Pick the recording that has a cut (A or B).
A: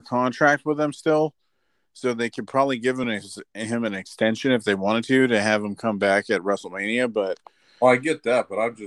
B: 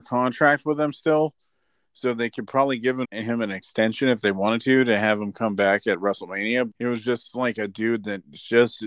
B